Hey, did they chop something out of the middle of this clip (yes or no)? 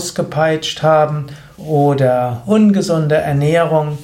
yes